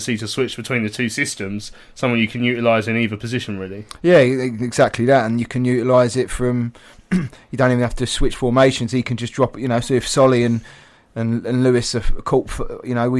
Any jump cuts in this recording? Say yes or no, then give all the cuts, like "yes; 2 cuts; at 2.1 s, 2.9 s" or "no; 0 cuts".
no; 0 cuts